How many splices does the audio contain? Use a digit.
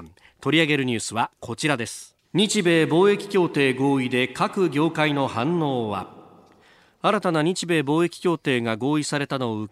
1